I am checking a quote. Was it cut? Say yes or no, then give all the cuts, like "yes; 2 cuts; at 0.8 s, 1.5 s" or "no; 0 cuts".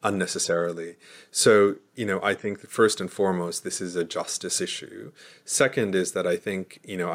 no; 0 cuts